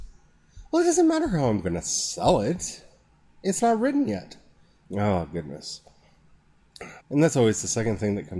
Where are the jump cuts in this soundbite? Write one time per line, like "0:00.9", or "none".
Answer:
0:04.8
0:07.0